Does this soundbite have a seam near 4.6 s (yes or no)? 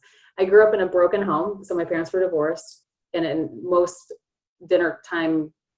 no